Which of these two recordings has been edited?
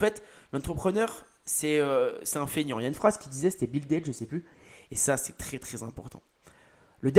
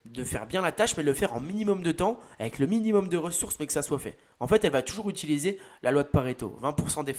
first; 1 cut; at 4.9 s

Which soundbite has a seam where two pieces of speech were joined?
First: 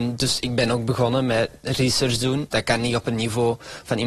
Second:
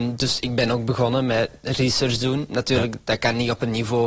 first; 1 cut; at 2.5 s

